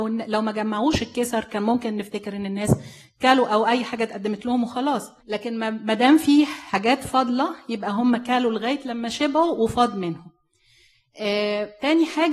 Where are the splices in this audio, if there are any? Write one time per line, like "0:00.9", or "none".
0:05.2